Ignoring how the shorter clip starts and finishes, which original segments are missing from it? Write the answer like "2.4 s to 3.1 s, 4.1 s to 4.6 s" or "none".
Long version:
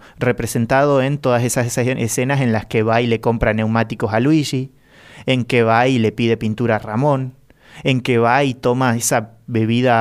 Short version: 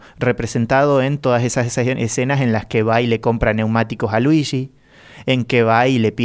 none